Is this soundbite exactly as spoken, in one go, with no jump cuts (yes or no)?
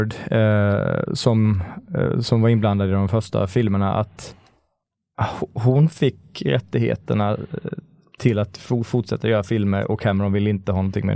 yes